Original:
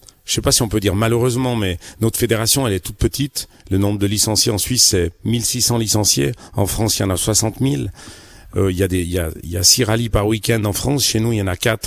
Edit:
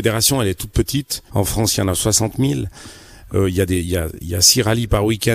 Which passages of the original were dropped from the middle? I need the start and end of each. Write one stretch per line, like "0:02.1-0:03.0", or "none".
0:03.5-0:06.5